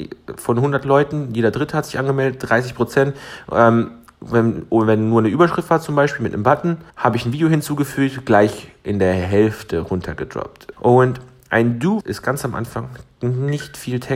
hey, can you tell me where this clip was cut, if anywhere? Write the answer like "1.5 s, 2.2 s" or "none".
6.9 s, 10.7 s, 12.0 s